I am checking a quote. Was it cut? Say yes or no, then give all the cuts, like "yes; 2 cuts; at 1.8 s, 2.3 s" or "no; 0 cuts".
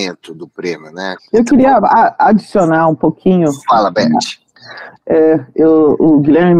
yes; 1 cut; at 1.2 s